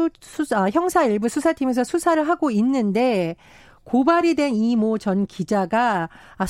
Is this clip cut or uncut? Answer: uncut